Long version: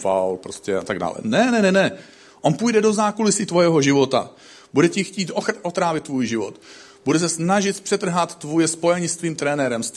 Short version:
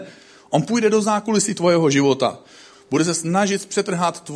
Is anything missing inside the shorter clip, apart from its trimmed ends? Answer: yes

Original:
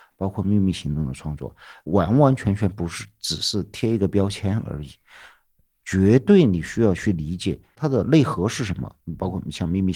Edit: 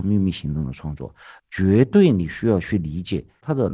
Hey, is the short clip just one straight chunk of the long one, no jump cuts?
no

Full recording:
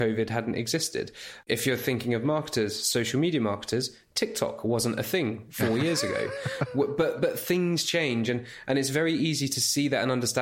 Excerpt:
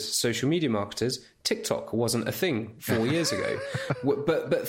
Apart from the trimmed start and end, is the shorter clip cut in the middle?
no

